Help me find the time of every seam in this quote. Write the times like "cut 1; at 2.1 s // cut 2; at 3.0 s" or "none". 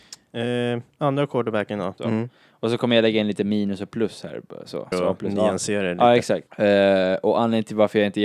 cut 1; at 2.0 s // cut 2; at 4.9 s // cut 3; at 6.5 s